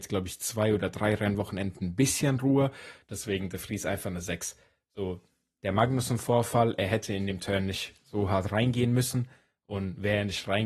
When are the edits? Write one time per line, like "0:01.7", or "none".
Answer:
0:03.0